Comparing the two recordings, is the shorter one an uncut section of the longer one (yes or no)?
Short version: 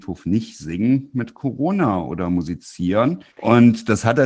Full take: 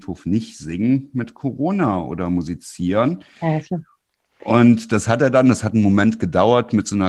no